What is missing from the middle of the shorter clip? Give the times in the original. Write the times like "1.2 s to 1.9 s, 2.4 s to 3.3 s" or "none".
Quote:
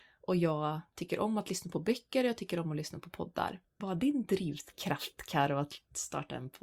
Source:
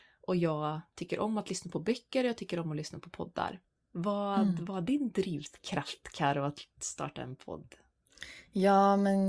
3.8 s to 4.7 s